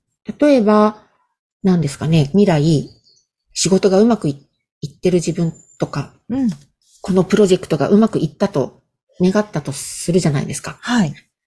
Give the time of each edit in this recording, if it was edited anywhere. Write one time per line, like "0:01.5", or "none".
0:02.3